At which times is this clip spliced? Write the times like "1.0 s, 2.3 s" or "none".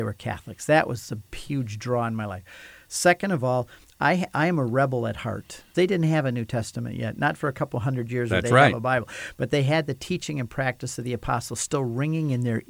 5.7 s